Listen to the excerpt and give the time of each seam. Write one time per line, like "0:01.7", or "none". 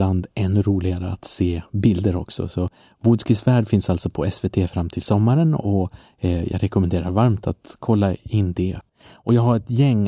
none